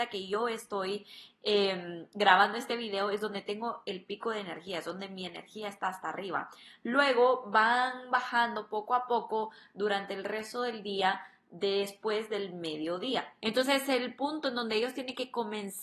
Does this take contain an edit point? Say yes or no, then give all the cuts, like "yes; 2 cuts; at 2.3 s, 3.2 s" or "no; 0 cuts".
yes; 1 cut; at 13.4 s